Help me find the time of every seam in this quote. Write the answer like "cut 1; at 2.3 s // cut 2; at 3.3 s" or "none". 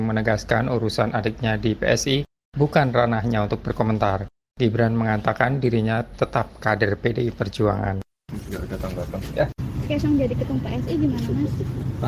cut 1; at 9.8 s